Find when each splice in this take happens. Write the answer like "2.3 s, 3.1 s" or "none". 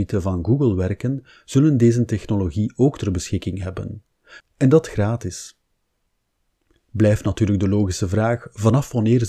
4.4 s